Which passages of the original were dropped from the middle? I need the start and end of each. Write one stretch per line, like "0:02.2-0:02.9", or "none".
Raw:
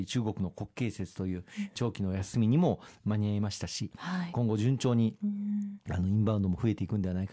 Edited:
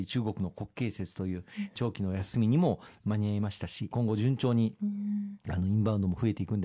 0:03.9-0:04.3